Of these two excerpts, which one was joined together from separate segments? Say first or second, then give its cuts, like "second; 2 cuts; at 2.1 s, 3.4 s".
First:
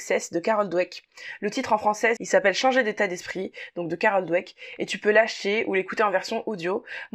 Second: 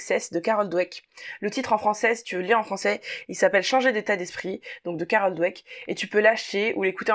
first; 1 cut; at 2.2 s